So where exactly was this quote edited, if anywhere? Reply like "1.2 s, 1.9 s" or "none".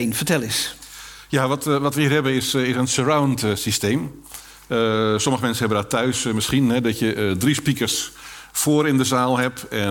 none